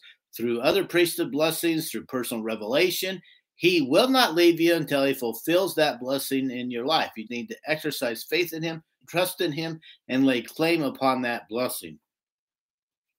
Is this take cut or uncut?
cut